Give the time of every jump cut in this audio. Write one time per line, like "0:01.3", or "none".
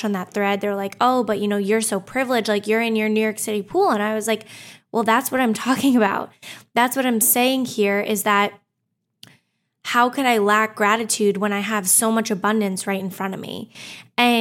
none